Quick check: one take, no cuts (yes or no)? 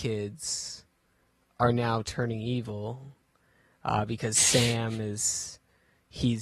yes